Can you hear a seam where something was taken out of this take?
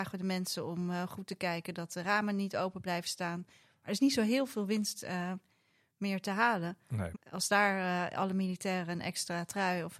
yes; 1 cut; at 7.1 s

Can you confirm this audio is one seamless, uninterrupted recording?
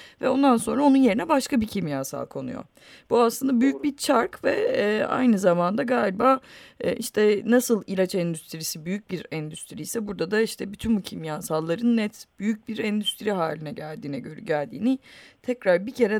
yes; 0 cuts

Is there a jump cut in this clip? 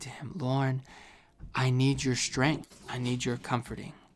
no; 0 cuts

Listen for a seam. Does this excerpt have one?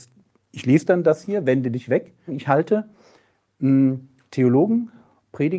yes; 1 cut; at 2.3 s

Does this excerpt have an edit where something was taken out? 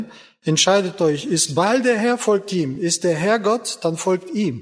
no; 0 cuts

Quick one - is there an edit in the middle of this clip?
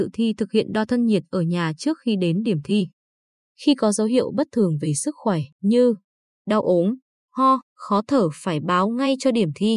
yes; 1 cut; at 7.6 s

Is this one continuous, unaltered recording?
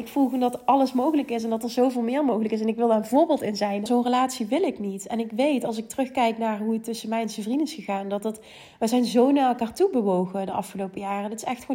no; 1 cut; at 3.9 s

